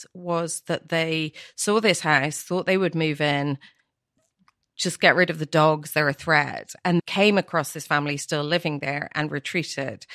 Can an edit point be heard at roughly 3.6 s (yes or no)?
no